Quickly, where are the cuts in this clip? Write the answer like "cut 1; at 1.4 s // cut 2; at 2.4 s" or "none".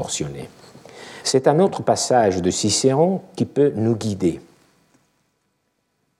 cut 1; at 1.2 s